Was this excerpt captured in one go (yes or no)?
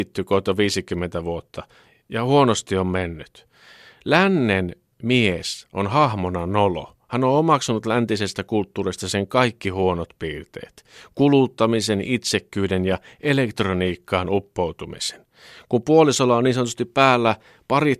yes